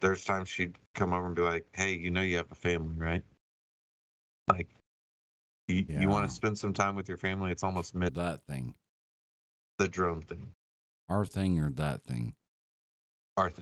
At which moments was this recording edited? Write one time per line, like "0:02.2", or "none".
0:08.1

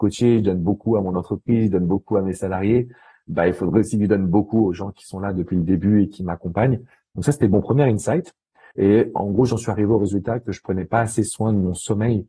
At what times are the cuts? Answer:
0:08.7

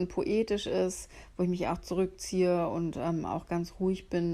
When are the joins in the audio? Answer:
none

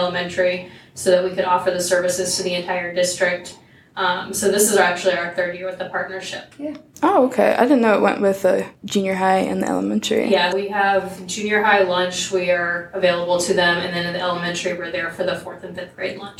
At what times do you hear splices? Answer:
0:06.5
0:10.5

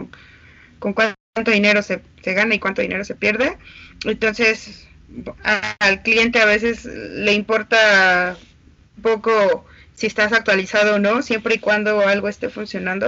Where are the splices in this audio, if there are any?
0:02.1
0:09.0

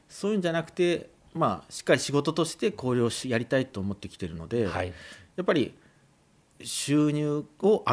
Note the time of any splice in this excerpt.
none

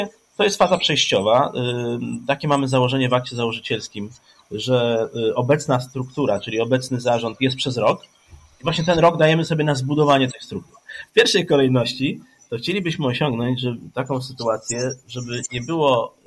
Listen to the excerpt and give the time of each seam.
0:11.0

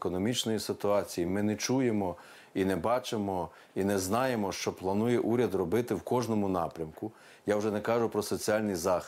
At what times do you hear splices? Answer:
none

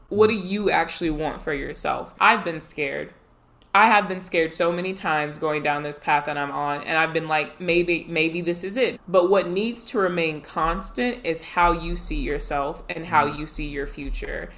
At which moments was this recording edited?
0:02.1
0:08.9

